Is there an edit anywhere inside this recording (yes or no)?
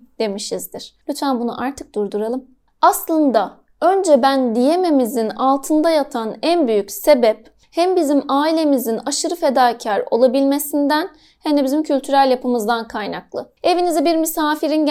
no